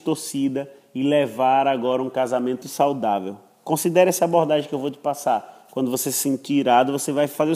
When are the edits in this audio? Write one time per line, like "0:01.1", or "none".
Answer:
0:02.6